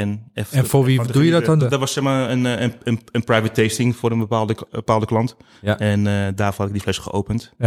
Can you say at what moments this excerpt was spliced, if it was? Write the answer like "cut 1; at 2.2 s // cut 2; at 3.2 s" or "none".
cut 1; at 1.6 s